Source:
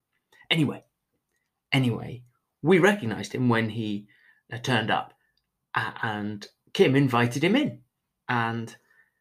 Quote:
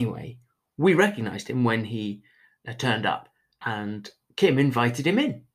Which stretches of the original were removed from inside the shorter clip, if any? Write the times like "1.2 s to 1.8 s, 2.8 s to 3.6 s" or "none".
5.5 s to 6.0 s